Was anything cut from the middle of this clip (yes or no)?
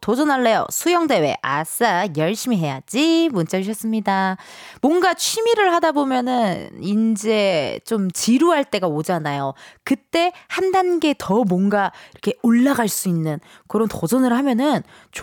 no